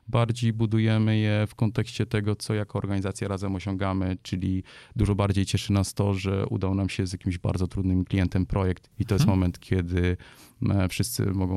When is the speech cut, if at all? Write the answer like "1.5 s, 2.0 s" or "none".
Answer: none